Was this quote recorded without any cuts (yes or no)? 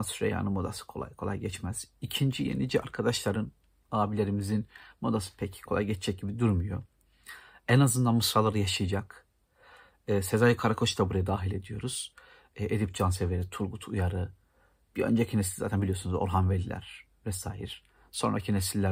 no